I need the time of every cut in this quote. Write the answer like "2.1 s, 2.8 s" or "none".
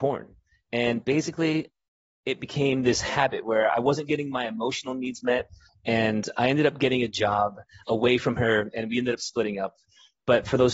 5.7 s, 7.8 s